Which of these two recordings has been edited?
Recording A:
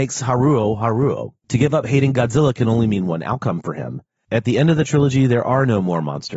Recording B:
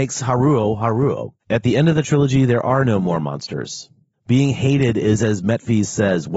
B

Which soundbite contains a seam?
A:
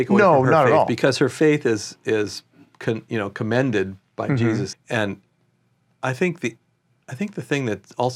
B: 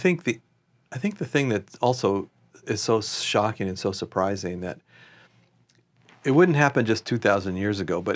A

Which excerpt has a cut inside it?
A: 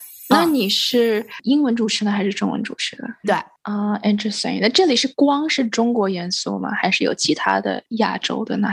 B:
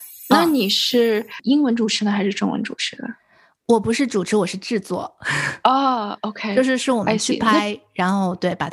A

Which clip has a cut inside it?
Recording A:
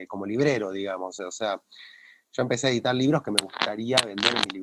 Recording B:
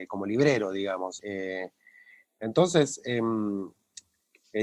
B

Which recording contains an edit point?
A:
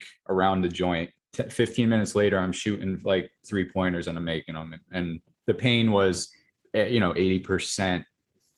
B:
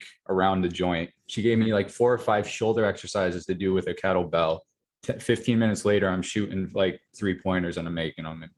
A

